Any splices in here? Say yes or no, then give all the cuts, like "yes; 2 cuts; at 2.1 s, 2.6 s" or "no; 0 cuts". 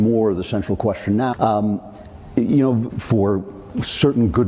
yes; 2 cuts; at 1.3 s, 2.9 s